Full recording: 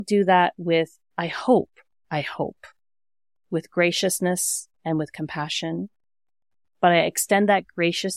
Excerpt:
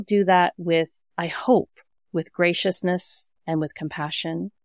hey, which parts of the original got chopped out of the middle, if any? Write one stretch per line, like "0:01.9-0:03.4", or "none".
0:02.0-0:03.3